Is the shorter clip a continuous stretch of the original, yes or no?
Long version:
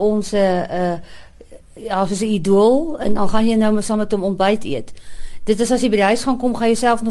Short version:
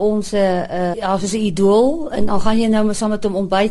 no